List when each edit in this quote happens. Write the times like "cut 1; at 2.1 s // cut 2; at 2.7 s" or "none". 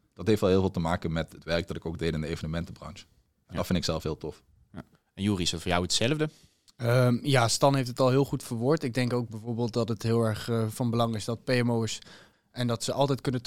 cut 1; at 12.3 s